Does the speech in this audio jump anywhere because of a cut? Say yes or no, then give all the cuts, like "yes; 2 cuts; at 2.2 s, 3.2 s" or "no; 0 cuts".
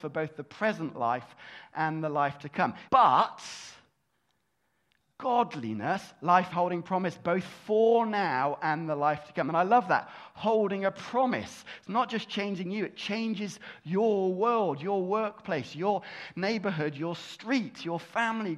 yes; 2 cuts; at 2.9 s, 6.5 s